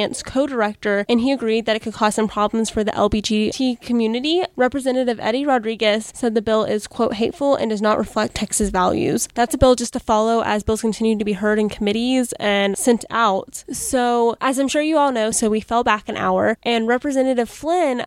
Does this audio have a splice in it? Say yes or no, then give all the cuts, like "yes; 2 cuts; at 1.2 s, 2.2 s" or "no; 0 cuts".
yes; 2 cuts; at 13.6 s, 15.3 s